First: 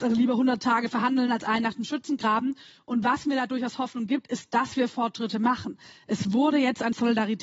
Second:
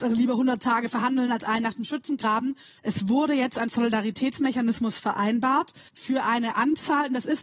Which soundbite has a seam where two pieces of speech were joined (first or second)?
second